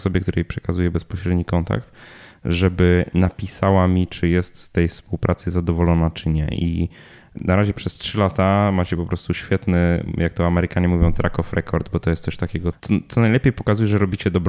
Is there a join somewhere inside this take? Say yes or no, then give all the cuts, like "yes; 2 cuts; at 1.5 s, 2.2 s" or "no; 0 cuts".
yes; 1 cut; at 12.7 s